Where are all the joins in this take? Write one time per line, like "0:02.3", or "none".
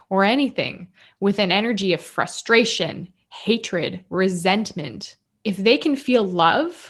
0:05.2